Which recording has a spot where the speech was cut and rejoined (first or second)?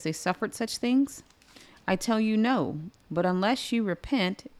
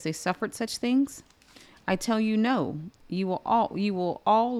second